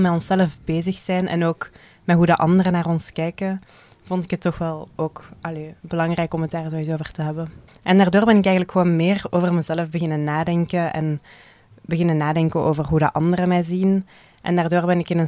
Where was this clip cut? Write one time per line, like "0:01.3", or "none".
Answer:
0:07.7